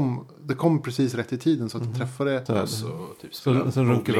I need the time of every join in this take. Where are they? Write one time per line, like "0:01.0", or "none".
0:02.5